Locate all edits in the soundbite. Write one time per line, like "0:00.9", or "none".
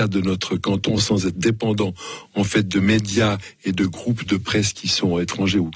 none